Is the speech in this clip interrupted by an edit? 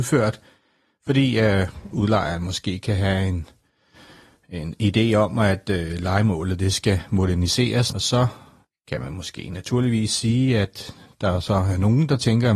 yes; 1 cut; at 7.9 s

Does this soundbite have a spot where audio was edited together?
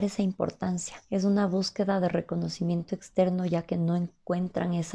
yes; 1 cut; at 1.0 s

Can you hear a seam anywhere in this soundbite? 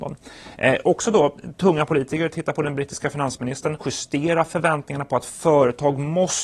yes; 1 cut; at 3.8 s

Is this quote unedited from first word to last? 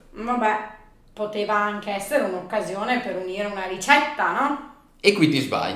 yes; 0 cuts

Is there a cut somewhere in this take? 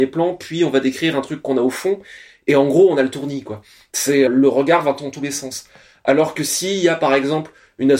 yes; 1 cut; at 4.3 s

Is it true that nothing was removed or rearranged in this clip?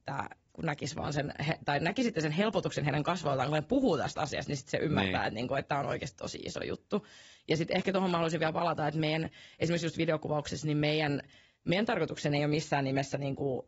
yes; 0 cuts

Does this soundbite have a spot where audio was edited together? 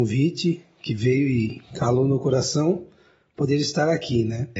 no; 0 cuts

